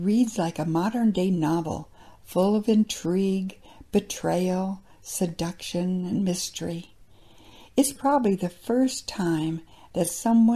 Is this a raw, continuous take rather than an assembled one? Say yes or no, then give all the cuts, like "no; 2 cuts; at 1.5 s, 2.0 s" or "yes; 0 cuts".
yes; 0 cuts